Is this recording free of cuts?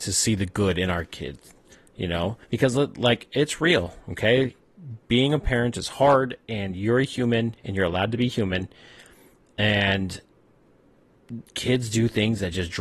no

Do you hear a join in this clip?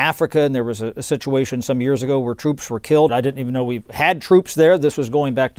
yes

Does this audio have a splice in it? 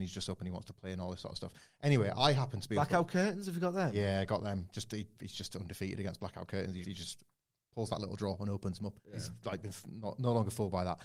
yes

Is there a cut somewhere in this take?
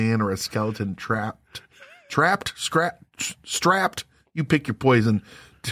no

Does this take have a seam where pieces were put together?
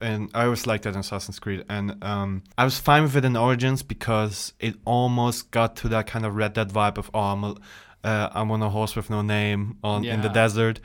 yes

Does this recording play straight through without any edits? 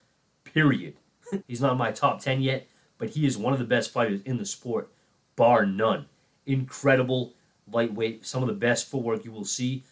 no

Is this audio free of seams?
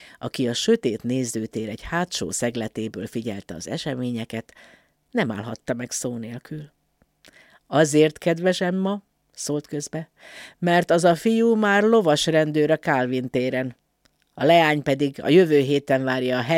yes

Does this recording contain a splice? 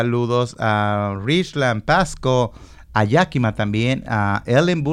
no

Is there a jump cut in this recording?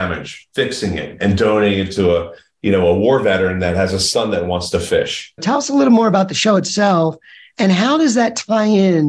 yes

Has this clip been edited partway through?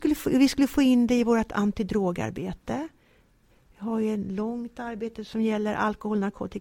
no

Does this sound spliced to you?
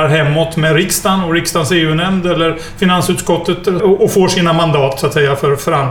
yes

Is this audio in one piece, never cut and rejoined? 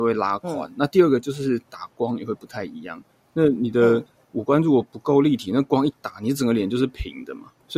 yes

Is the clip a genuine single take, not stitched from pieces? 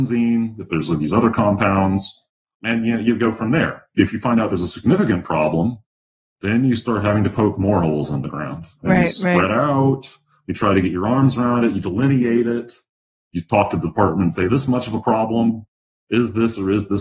yes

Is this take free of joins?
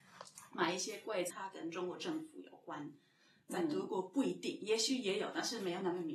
no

